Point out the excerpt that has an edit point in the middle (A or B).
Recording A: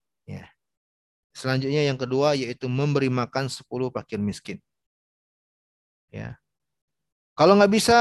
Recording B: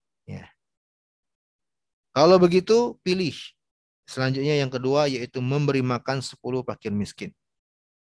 A